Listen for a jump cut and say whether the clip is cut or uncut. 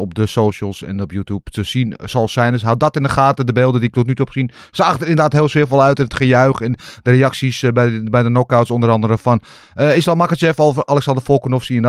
uncut